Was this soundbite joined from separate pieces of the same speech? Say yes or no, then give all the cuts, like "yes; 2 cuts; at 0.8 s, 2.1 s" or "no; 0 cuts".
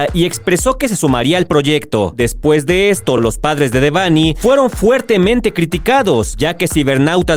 no; 0 cuts